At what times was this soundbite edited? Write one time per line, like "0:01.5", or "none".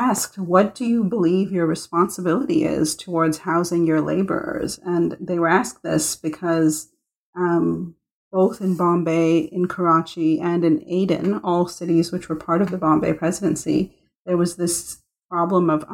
none